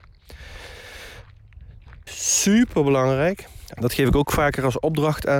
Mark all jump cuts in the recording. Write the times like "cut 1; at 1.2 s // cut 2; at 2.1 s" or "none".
cut 1; at 2.1 s // cut 2; at 3.7 s